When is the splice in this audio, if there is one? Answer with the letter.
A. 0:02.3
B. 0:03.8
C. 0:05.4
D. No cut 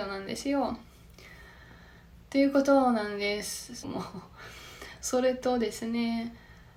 B